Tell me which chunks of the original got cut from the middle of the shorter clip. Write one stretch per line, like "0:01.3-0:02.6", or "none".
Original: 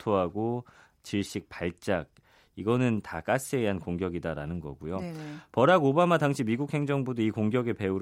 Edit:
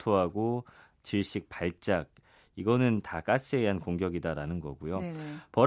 none